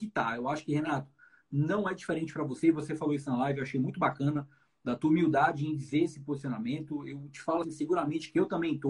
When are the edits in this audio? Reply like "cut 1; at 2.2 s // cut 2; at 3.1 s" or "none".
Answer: cut 1; at 7.6 s